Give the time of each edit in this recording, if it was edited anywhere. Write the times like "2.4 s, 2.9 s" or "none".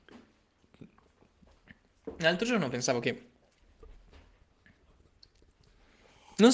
none